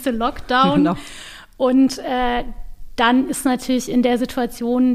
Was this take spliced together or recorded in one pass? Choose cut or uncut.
uncut